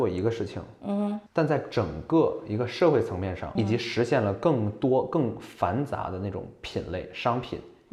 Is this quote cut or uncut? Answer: cut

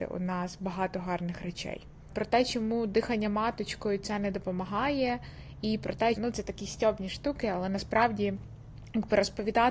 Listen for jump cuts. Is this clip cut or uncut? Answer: cut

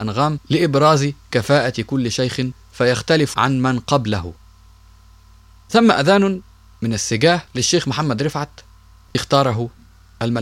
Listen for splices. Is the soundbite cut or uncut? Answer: uncut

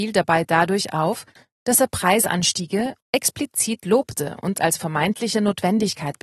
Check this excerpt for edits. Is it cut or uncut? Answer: cut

